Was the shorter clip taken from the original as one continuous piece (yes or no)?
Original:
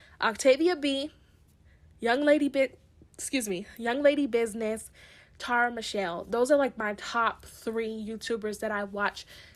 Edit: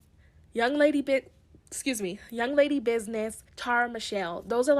no